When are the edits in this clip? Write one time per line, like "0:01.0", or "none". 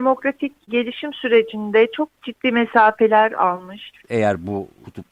0:04.0